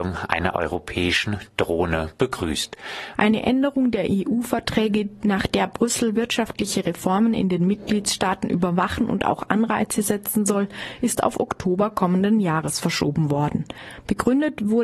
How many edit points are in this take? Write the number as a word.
one